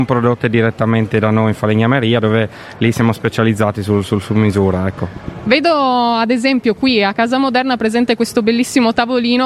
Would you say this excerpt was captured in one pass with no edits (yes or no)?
yes